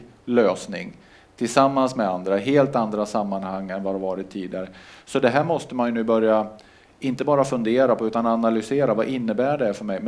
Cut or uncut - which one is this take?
uncut